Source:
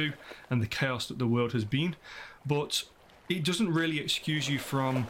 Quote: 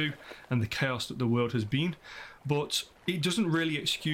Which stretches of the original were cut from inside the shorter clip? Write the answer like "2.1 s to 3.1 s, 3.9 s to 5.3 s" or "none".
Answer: 3.0 s to 3.2 s